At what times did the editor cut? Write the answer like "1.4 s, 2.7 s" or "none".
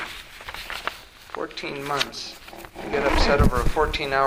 none